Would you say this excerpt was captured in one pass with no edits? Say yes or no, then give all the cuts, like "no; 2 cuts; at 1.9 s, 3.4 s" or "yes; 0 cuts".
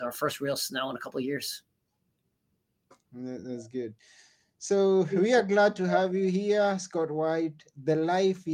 yes; 0 cuts